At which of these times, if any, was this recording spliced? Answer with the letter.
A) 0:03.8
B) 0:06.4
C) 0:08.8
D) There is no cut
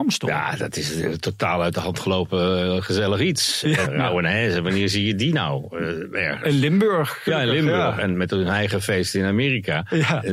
A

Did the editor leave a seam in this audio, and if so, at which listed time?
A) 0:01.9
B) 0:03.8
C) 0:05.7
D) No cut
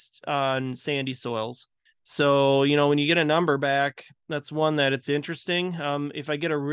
A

